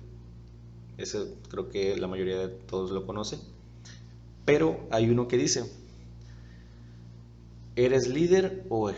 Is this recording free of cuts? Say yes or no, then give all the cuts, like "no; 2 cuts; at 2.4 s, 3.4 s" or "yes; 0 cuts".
yes; 0 cuts